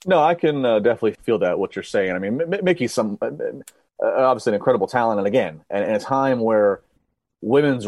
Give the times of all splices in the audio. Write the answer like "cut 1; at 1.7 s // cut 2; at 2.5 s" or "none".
cut 1; at 1.1 s

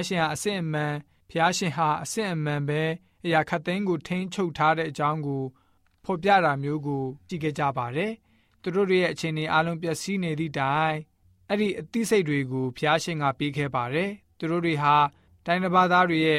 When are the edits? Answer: cut 1; at 7.3 s

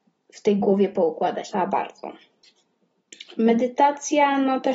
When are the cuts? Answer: cut 1; at 1.5 s

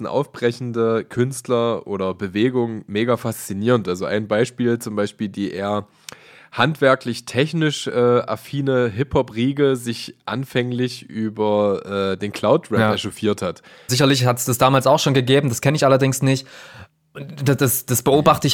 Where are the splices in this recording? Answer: cut 1; at 3.8 s // cut 2; at 13.9 s

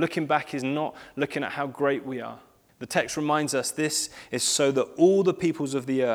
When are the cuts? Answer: cut 1; at 2.7 s

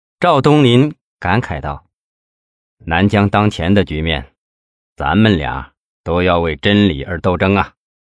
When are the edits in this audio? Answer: none

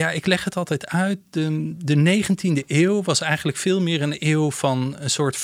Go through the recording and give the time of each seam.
none

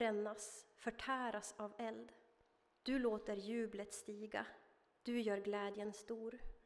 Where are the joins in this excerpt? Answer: cut 1; at 2.8 s

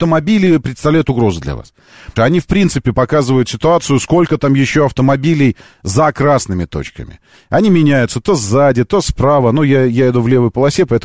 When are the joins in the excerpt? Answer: cut 1; at 2.2 s

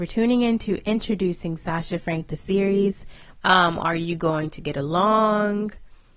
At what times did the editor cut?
cut 1; at 3.3 s

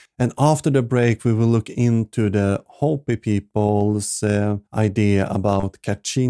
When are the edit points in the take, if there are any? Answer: cut 1; at 4.7 s

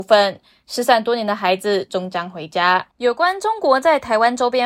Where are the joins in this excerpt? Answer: cut 1; at 2.9 s

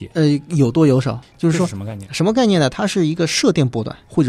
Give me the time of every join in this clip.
cut 1; at 1.2 s

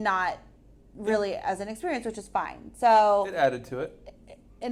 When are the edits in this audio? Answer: none

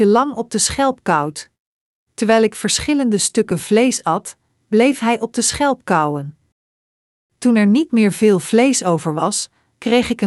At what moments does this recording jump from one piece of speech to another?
none

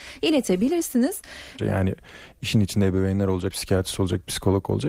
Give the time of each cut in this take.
cut 1; at 1.6 s // cut 2; at 3.5 s

